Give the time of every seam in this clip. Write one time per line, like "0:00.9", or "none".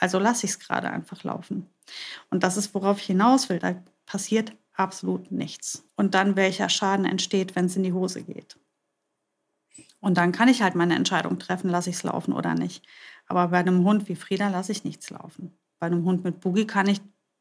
0:03.6
0:05.9